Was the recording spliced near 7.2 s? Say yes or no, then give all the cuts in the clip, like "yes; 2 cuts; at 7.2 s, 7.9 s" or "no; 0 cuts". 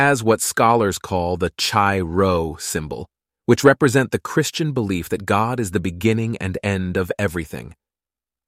no; 1 cut; at 3.3 s